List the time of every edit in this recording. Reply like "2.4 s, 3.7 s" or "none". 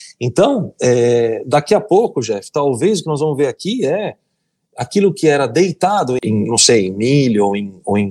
6.2 s